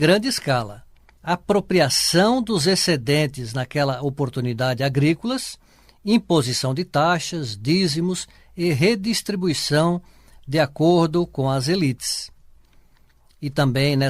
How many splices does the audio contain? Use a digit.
1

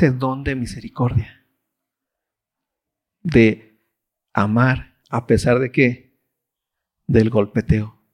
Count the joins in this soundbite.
0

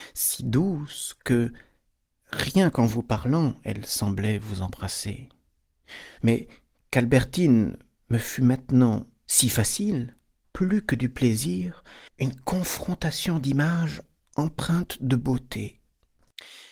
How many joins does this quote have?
3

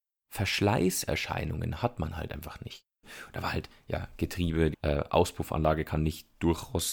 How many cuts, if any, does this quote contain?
2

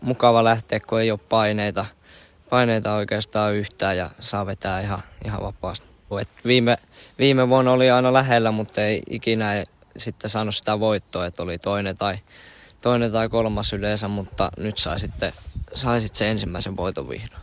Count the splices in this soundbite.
1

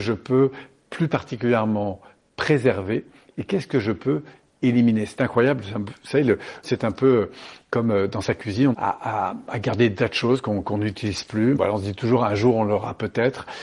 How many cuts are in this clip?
3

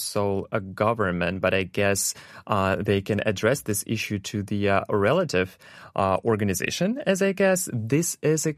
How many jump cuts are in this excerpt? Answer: 0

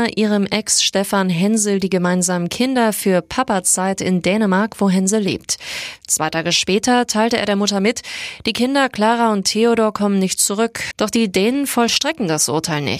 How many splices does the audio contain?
1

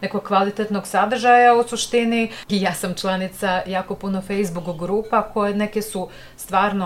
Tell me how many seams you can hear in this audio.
1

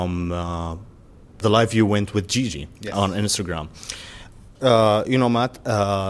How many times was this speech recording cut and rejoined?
2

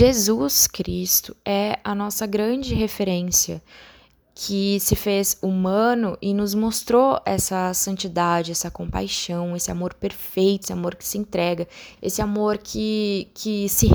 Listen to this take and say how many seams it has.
2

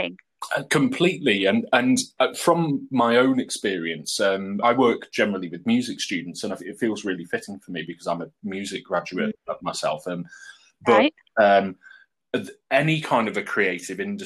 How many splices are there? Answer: 1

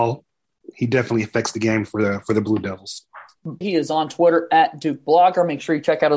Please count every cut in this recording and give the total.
1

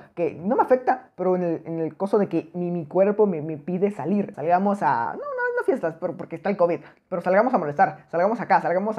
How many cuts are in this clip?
1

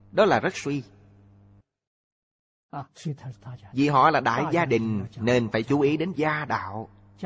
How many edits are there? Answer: 0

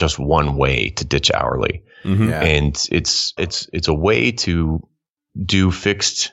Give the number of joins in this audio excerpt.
1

